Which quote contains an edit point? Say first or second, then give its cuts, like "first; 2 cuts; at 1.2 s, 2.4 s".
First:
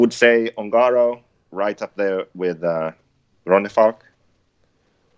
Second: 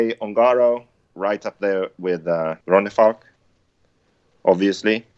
second; 1 cut; at 2.6 s